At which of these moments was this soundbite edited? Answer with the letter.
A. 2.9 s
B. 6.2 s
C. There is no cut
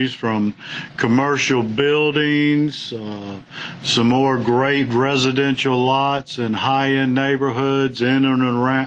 C